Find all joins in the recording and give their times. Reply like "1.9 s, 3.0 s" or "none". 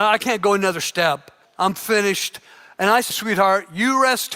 1.4 s, 3.1 s